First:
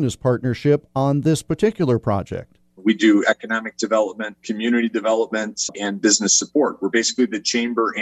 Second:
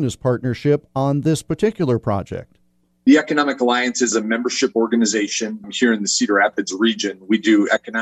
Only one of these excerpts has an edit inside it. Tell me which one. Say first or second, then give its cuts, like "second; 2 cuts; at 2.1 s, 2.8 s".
first; 3 cuts; at 2.8 s, 4.4 s, 5.7 s